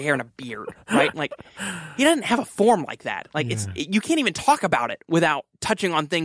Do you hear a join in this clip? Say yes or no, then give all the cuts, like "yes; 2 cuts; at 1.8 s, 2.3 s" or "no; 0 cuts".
no; 0 cuts